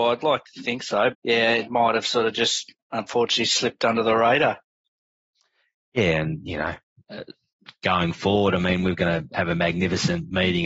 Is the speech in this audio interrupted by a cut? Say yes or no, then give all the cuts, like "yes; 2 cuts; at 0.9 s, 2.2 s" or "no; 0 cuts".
yes; 1 cut; at 1.1 s